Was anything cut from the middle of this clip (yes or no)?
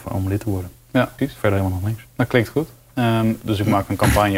yes